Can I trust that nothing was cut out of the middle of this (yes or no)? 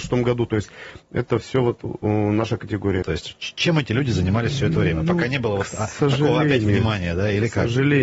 no